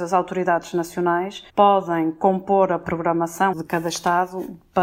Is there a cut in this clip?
yes; 2 cuts; at 1.5 s, 3.5 s

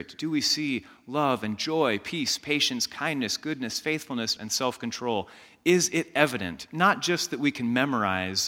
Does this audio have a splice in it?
yes; 1 cut; at 4.4 s

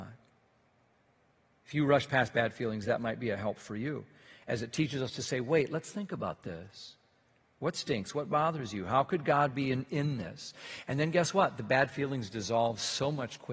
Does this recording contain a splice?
no; 0 cuts

